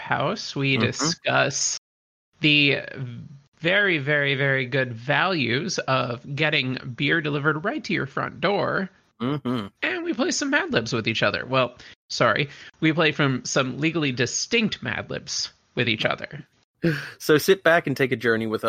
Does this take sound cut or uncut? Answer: uncut